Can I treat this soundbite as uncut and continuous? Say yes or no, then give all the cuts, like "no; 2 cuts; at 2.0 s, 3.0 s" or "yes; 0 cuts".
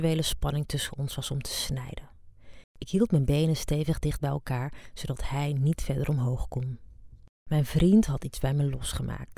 no; 2 cuts; at 2.6 s, 7.4 s